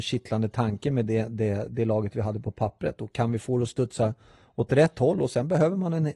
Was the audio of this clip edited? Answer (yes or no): no